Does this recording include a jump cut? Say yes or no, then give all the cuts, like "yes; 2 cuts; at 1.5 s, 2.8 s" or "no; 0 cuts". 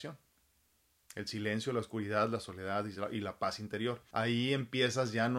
yes; 1 cut; at 4.1 s